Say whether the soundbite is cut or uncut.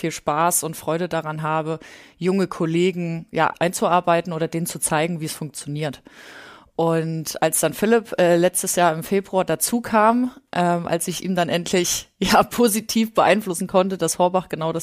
uncut